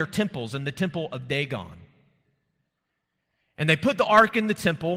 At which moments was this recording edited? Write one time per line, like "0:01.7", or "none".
none